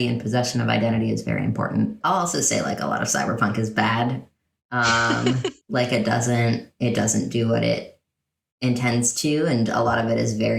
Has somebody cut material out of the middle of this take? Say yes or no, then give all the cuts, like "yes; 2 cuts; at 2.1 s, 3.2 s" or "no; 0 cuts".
yes; 2 cuts; at 2.0 s, 5.6 s